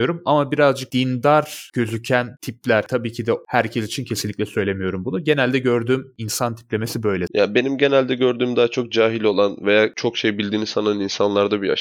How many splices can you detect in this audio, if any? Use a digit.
0